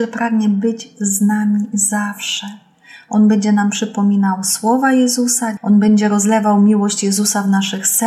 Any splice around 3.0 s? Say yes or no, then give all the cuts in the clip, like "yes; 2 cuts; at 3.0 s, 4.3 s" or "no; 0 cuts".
no; 1 cut; at 5.6 s